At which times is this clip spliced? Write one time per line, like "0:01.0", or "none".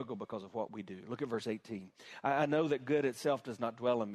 none